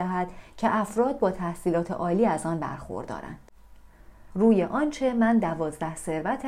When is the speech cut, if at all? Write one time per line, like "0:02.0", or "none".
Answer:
0:04.3